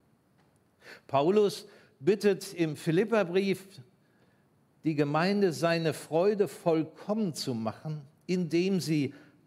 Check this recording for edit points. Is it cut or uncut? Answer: uncut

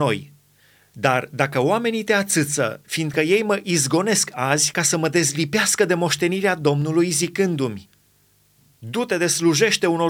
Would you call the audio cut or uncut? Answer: cut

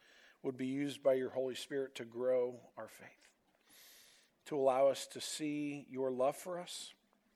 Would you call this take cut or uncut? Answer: uncut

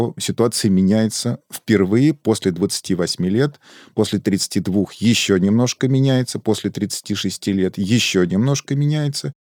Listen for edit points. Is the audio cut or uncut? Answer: uncut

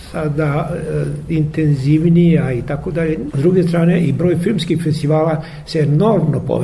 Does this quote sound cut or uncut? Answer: cut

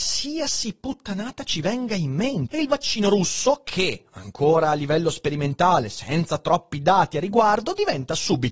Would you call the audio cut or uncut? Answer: cut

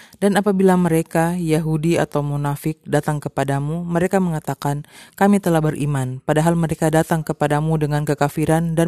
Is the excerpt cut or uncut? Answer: uncut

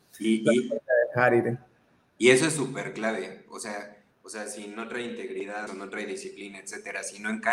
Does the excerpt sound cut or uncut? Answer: cut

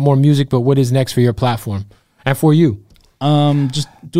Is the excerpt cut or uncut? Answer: uncut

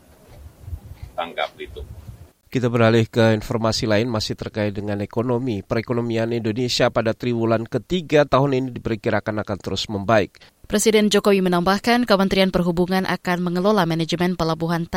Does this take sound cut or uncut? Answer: cut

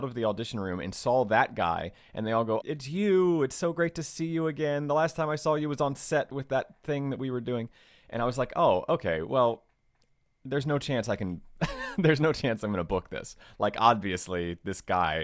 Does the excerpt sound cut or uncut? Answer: cut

